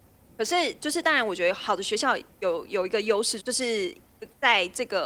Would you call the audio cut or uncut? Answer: cut